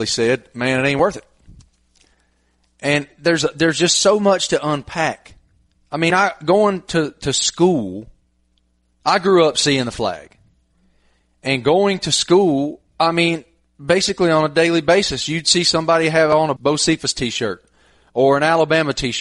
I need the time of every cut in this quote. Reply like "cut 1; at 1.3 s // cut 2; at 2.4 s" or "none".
cut 1; at 16.6 s